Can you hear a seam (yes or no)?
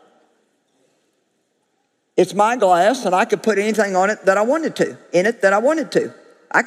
no